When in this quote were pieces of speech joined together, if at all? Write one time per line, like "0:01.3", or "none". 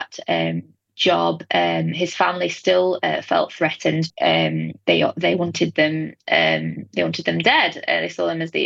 0:04.1